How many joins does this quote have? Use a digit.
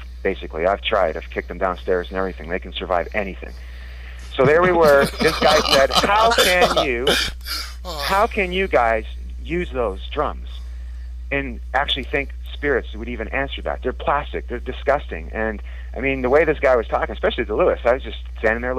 0